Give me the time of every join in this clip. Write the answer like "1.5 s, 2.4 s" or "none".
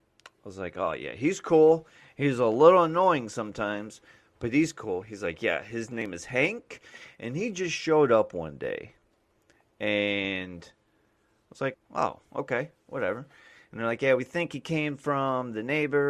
11.7 s

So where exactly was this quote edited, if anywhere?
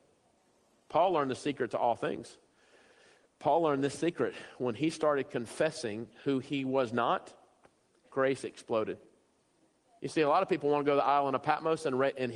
none

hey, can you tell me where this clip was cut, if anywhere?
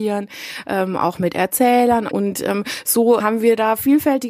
2.1 s, 3.2 s

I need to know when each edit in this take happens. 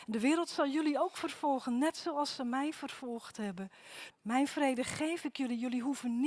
4.1 s

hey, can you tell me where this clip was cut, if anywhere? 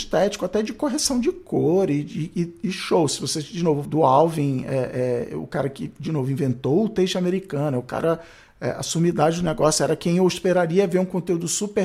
3.9 s

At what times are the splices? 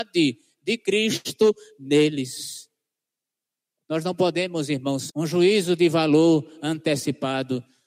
5.1 s

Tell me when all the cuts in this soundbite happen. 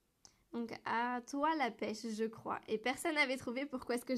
none

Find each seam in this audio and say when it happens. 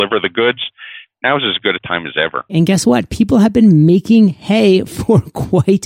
2.5 s

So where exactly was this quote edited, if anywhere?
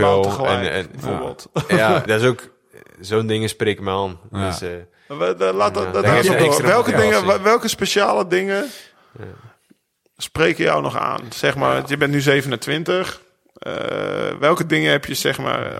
2.1 s

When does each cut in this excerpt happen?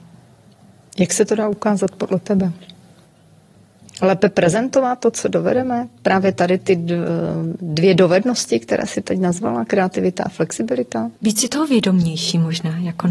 11.2 s

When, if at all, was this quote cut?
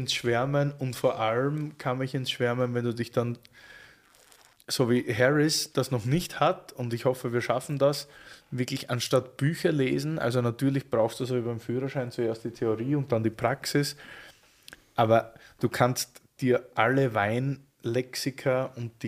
none

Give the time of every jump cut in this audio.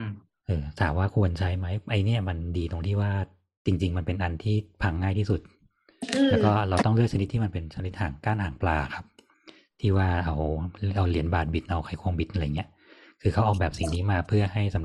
none

